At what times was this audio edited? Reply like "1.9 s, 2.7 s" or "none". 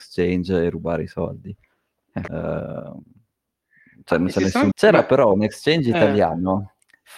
2.3 s, 4.7 s